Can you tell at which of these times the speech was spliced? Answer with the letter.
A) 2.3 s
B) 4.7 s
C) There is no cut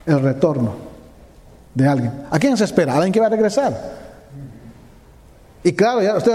C